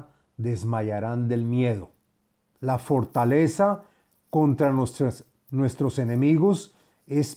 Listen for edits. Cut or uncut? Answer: cut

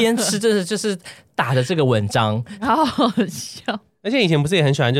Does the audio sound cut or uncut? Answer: uncut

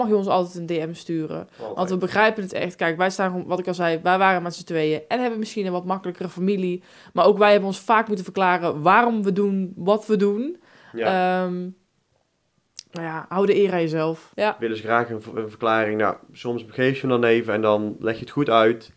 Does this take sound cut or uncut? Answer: cut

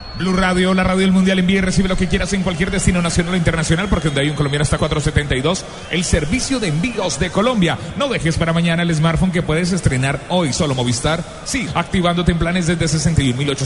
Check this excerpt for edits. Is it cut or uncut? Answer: cut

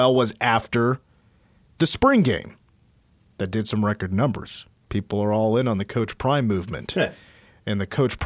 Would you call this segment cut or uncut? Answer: uncut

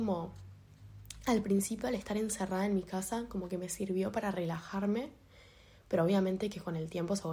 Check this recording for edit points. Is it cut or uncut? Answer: uncut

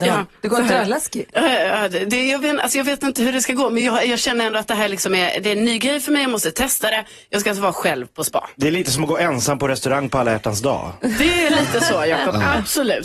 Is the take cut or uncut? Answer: uncut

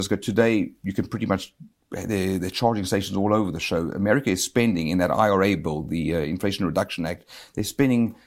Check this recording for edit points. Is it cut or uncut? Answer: uncut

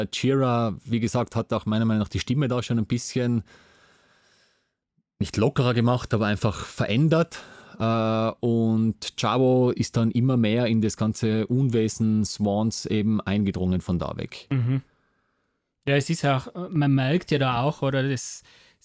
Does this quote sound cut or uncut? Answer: uncut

